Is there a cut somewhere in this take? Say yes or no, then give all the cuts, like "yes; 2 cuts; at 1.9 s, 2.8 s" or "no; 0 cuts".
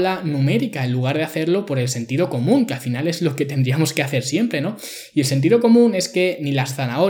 no; 0 cuts